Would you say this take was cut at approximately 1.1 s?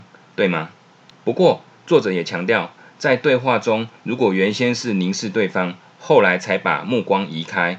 yes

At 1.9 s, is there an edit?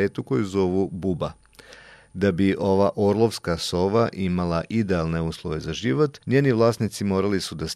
no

